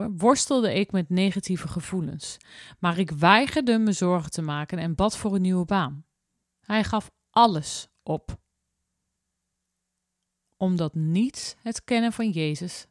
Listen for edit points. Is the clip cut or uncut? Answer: cut